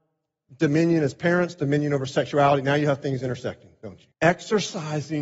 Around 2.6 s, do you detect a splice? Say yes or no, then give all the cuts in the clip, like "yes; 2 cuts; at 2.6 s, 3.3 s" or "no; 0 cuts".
no; 1 cut; at 4.1 s